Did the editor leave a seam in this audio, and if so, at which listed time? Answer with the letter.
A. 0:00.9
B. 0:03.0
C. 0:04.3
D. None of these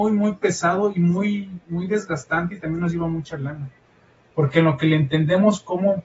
D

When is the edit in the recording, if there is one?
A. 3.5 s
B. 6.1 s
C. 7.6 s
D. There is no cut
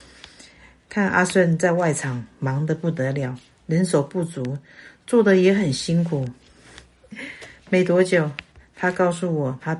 D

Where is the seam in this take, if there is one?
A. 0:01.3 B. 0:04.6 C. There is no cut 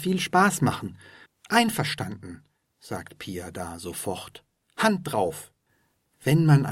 A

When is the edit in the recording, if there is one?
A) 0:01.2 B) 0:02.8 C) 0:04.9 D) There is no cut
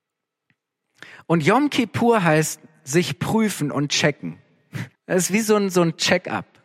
C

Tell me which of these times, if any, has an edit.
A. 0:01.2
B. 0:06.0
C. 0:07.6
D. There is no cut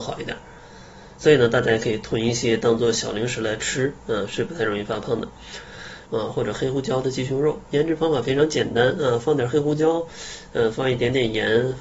B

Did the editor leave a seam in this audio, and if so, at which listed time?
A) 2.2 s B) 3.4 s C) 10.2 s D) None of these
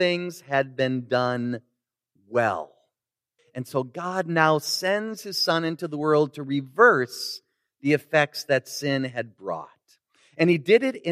B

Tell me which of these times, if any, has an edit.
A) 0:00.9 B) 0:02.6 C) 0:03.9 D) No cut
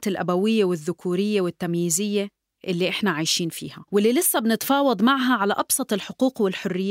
C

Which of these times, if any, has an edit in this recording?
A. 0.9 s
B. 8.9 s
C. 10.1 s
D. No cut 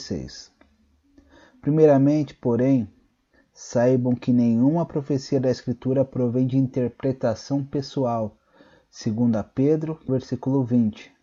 C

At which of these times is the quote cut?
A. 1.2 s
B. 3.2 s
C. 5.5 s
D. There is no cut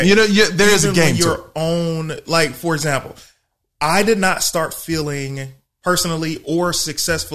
D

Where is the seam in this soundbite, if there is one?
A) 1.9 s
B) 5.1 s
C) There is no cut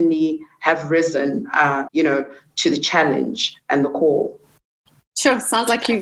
A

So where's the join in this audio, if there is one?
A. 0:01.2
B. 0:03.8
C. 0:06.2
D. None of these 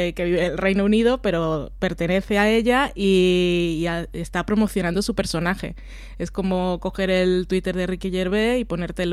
D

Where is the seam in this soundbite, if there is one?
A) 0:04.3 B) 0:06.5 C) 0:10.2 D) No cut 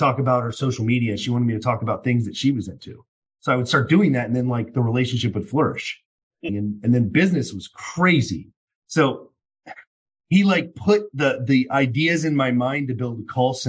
B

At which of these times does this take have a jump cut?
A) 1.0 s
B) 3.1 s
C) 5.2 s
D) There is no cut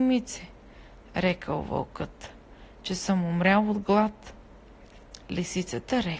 C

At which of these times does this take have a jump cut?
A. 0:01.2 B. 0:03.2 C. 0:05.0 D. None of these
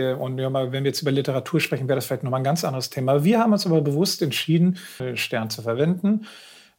C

